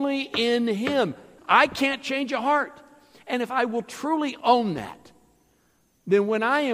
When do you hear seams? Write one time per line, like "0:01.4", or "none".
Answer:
0:01.4